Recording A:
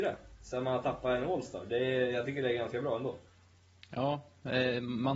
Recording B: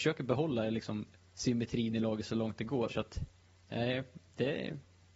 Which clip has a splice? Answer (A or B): B